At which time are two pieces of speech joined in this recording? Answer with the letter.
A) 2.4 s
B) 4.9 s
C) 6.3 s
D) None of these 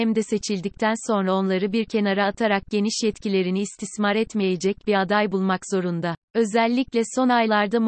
C